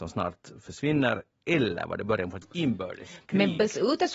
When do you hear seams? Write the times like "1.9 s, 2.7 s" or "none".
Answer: none